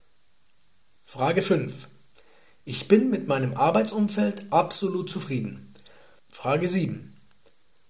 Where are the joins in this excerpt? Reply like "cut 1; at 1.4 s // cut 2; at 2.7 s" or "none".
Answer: cut 1; at 1.0 s // cut 2; at 6.2 s